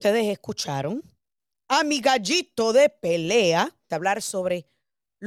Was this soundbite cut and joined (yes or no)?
yes